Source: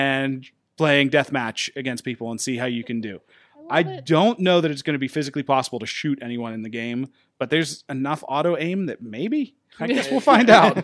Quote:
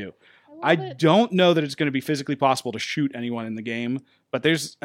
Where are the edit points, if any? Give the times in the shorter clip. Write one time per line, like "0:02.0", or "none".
none